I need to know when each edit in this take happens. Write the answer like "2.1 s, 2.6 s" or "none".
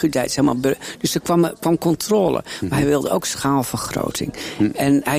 none